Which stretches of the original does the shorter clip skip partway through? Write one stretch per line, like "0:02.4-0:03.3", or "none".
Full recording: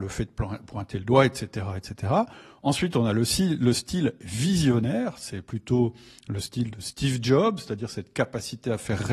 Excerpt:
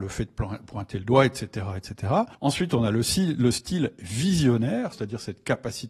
0:02.3-0:02.6
0:05.1-0:07.6